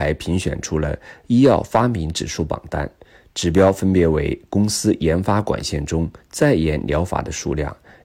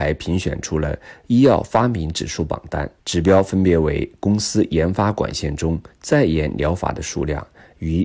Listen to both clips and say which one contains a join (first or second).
second